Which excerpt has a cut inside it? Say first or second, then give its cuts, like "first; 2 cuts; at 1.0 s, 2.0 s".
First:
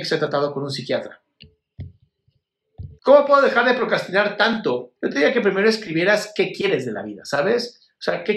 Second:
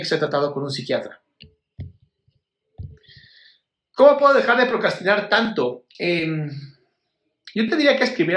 first; 2 cuts; at 3.0 s, 5.0 s